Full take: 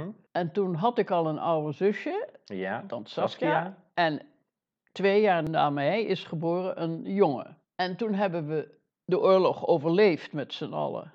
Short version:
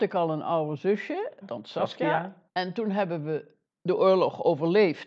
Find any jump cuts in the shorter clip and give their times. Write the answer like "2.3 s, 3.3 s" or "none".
1.4 s, 2.5 s

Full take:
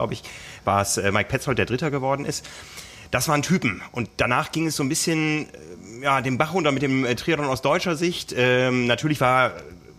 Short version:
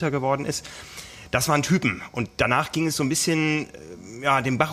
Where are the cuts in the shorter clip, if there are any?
none

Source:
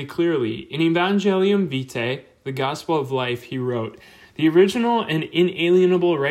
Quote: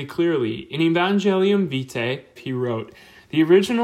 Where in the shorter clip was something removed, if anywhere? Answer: 2.4 s

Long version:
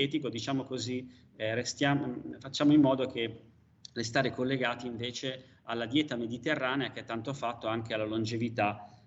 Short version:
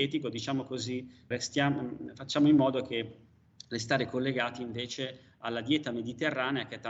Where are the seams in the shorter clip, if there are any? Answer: 1.3 s

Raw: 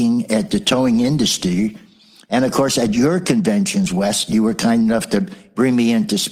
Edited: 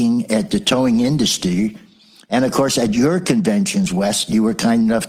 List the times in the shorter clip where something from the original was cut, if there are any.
none

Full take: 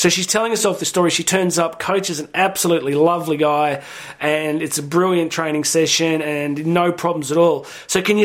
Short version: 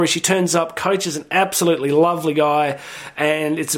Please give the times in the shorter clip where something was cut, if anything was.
none

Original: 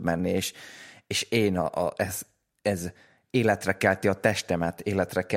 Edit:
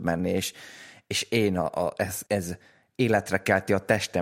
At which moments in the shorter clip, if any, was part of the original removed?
2.3 s

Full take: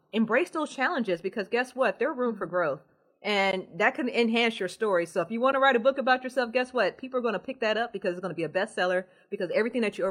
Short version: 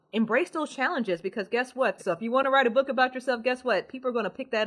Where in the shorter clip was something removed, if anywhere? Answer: 2.0 s

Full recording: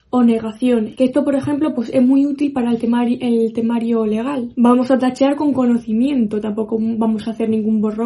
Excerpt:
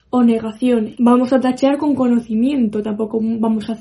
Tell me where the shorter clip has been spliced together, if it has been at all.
1.0 s

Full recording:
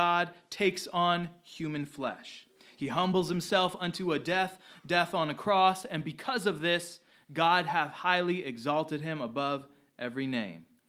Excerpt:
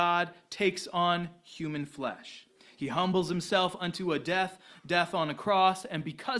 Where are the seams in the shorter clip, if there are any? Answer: none

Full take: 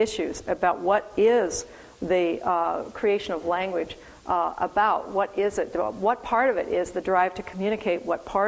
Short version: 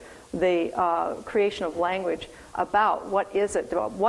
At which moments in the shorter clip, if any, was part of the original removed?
2.5 s

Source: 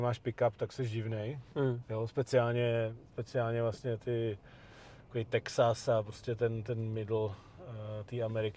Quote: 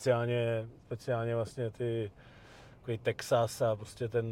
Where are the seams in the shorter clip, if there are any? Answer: none

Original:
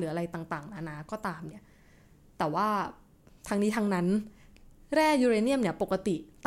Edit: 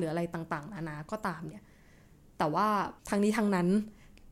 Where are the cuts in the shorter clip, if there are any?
3.0 s

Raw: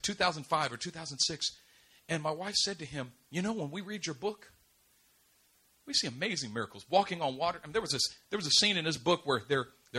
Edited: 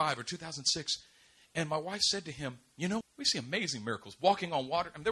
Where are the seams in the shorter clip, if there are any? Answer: 3.0 s

